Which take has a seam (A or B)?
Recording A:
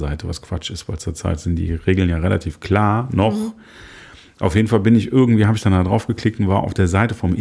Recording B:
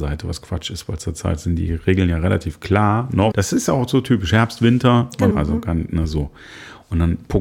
B